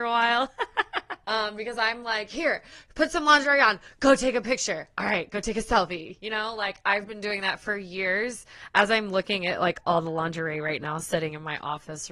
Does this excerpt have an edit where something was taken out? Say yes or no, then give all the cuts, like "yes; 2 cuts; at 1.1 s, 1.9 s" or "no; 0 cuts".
no; 0 cuts